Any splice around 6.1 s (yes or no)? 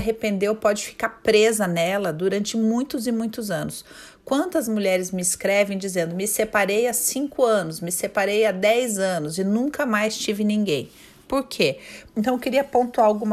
no